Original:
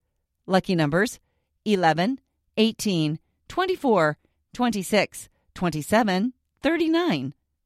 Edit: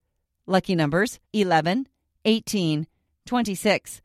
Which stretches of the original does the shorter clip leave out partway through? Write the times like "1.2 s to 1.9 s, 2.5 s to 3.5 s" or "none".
1.2 s to 1.6 s, 3.4 s to 4.3 s